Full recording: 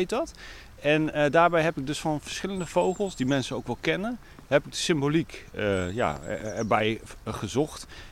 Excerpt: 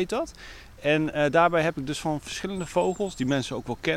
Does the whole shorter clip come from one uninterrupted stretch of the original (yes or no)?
yes